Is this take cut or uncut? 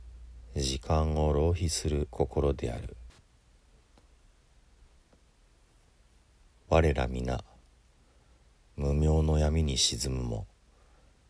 cut